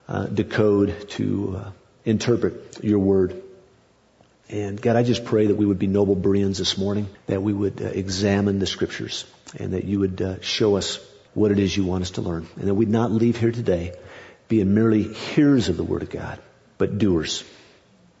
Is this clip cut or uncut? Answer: uncut